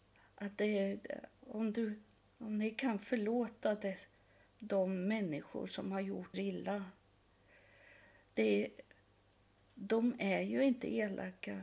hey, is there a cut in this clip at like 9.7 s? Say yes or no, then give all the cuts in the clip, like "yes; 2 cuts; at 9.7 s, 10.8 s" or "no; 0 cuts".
yes; 2 cuts; at 6.3 s, 9.7 s